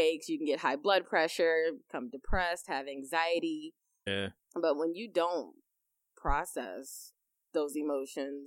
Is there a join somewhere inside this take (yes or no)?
yes